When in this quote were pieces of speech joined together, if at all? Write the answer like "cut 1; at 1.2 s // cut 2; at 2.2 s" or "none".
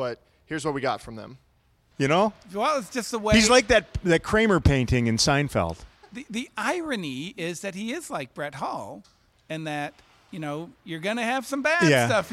cut 1; at 1.9 s